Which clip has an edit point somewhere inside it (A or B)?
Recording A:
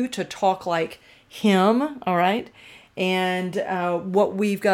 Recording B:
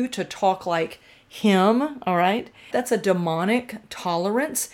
B